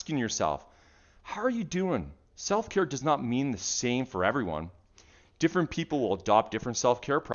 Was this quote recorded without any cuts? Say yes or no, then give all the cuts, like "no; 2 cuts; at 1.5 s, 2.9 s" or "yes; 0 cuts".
no; 1 cut; at 2.3 s